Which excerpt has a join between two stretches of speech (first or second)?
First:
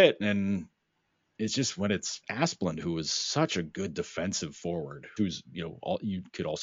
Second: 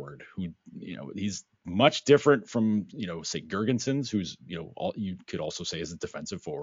first